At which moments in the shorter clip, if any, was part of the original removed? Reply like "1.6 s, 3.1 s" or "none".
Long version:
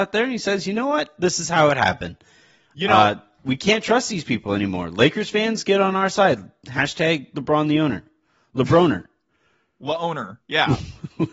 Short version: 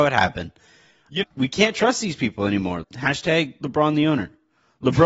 1.2 s, 2.8 s